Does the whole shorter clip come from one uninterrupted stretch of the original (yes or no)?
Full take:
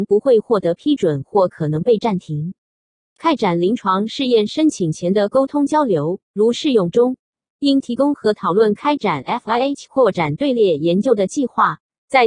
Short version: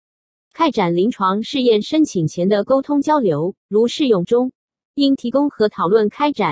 yes